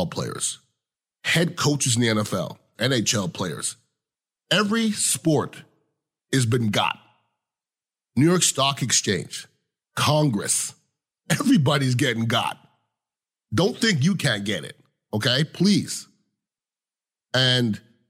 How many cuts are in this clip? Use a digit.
1